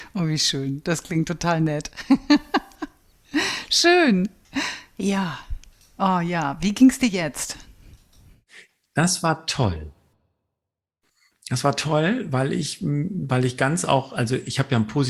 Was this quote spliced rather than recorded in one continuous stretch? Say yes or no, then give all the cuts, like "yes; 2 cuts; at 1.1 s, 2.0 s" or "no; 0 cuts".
no; 0 cuts